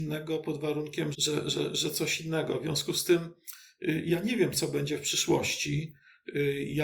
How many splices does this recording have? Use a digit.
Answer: 1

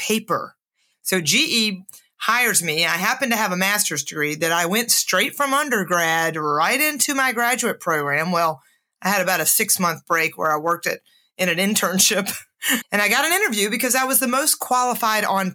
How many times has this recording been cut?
2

